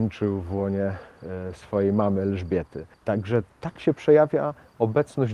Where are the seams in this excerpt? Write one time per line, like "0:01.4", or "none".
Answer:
0:02.9